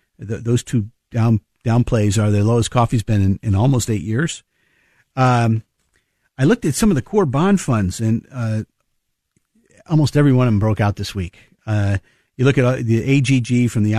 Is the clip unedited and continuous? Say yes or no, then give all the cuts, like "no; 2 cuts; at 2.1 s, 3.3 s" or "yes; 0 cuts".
yes; 0 cuts